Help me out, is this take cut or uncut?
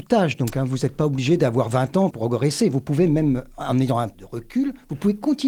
cut